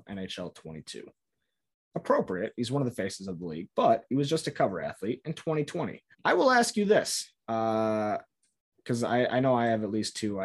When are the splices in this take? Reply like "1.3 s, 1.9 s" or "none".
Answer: 6.1 s, 7.4 s